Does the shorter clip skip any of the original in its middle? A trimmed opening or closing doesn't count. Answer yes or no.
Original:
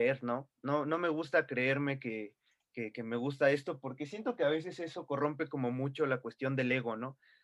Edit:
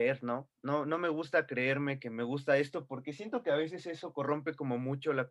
yes